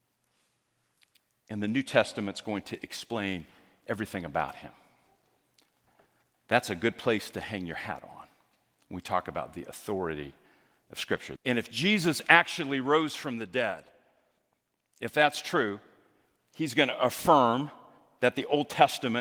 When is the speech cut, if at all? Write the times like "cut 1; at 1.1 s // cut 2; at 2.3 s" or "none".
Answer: cut 1; at 11.4 s